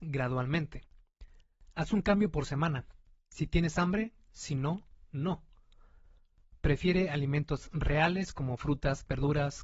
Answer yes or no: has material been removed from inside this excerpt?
yes